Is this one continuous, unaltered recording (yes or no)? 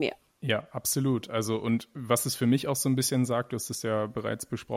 yes